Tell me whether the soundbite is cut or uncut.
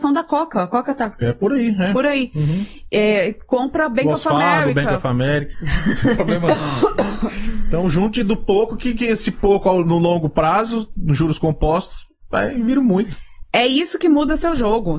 cut